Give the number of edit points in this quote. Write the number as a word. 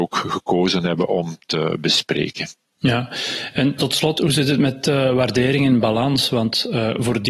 zero